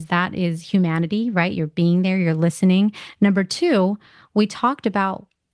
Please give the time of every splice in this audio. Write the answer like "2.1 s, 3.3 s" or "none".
none

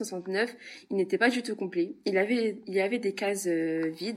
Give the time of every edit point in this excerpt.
none

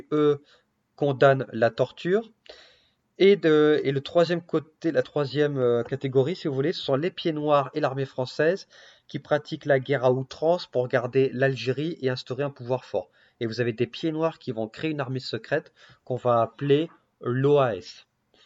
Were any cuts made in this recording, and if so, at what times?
none

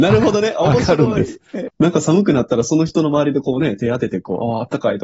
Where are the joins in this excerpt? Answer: 1.7 s

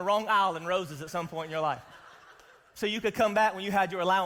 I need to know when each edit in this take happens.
none

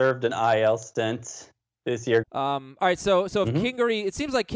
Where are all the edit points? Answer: 2.2 s

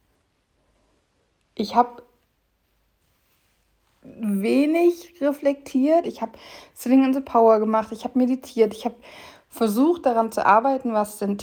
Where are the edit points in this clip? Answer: 6.0 s

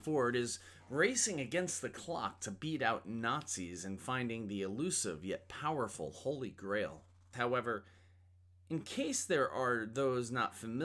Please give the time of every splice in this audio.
7.3 s

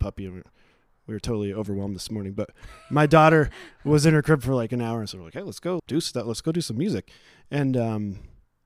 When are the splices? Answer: 5.8 s

